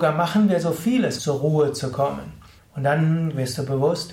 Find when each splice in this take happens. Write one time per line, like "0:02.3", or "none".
0:01.2
0:02.6